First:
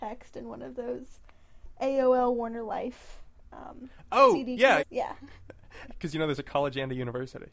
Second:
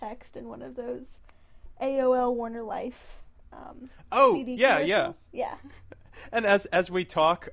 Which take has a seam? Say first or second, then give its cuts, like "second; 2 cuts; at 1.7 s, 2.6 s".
first; 2 cuts; at 4.8 s, 5.9 s